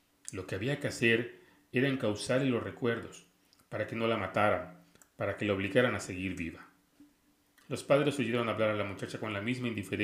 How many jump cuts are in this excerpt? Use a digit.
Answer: 0